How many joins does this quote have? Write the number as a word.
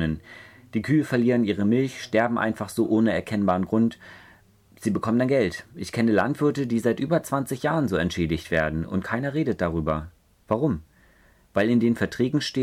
zero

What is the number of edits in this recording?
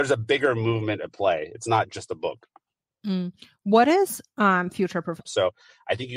one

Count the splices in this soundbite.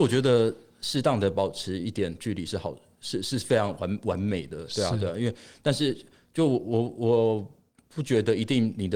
zero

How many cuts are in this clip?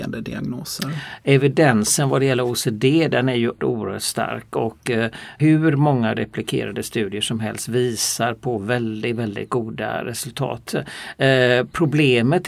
one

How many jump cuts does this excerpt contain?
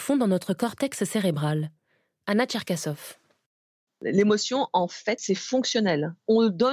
one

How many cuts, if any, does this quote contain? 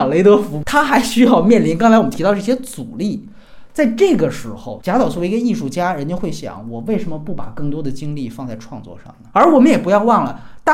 two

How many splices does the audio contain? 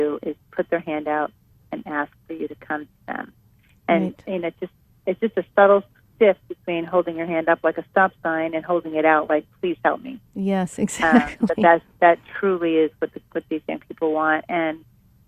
zero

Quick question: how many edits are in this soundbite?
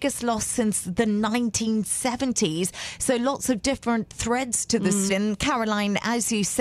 one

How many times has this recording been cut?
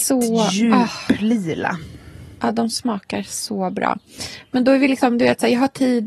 zero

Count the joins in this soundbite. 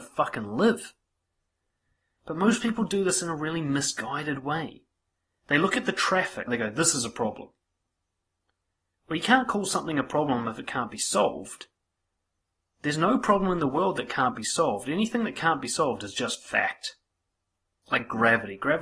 one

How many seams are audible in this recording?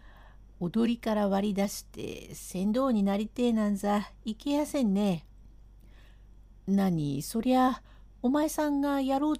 one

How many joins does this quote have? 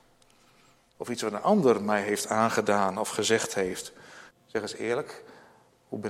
two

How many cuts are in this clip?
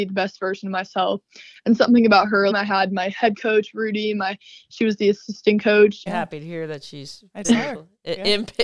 three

